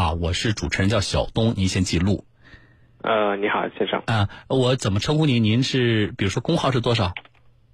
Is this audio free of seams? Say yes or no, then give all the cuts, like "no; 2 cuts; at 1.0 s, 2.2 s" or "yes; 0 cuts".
yes; 0 cuts